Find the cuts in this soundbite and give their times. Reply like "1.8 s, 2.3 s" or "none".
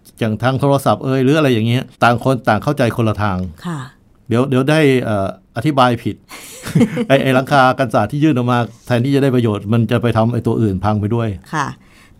1.9 s